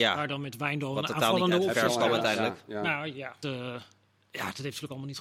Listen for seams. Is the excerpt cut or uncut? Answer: cut